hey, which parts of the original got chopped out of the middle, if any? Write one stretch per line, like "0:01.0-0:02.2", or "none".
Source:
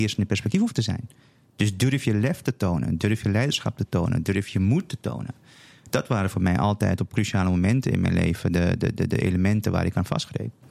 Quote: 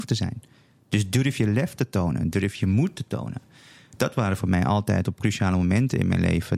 0:03.0-0:04.2